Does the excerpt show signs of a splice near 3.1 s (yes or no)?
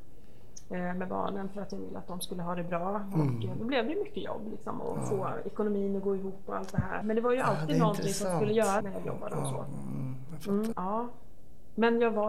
no